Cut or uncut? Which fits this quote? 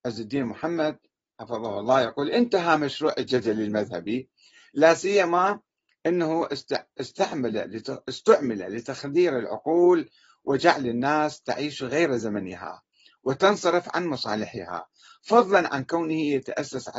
uncut